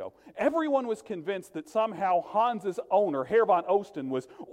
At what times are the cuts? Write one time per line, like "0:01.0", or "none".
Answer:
none